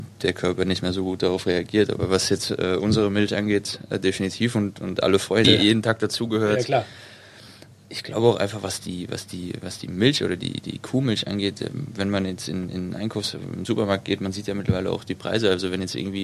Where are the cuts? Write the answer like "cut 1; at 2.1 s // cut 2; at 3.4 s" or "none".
cut 1; at 5.4 s